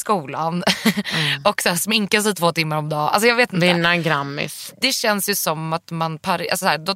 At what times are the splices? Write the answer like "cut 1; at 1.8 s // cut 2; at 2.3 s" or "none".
none